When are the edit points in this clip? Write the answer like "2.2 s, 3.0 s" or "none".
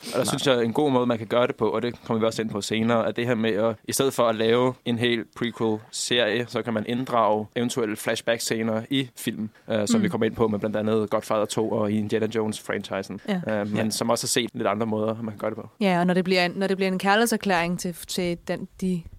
14.5 s